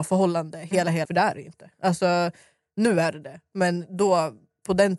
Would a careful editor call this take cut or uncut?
cut